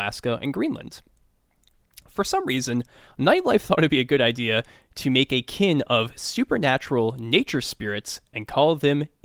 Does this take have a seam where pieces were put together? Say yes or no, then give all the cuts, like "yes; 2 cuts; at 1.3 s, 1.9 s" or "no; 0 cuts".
no; 0 cuts